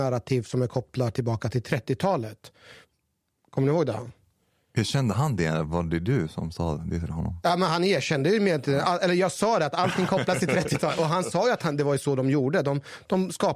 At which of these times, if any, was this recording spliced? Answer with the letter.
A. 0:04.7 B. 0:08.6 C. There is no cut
C